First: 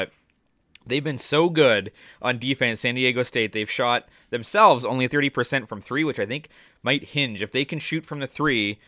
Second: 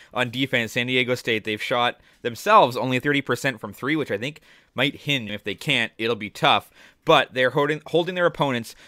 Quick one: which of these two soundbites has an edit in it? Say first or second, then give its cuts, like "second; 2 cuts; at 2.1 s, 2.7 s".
second; 1 cut; at 5.3 s